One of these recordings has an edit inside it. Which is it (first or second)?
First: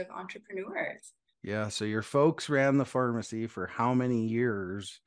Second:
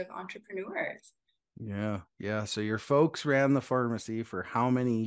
first